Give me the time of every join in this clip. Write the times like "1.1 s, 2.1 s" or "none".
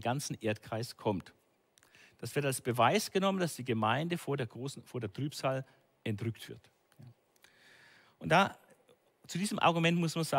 none